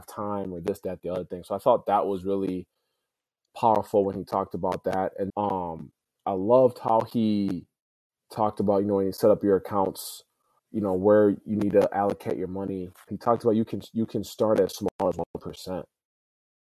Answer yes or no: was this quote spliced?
yes